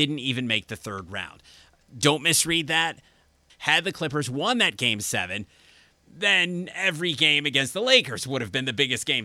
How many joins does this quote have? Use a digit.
1